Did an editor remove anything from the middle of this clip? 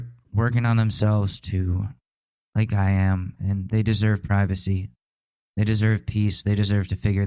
no; 0 cuts

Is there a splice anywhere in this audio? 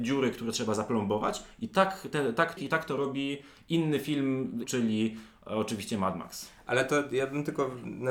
yes; 2 cuts; at 2.6 s, 4.6 s

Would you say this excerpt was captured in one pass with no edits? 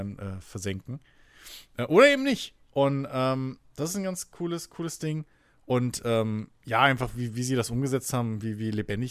yes; 0 cuts

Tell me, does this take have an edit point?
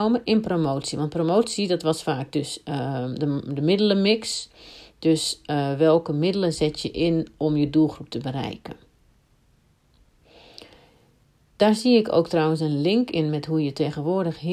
no; 0 cuts

